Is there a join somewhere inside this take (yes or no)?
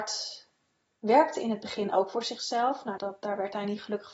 yes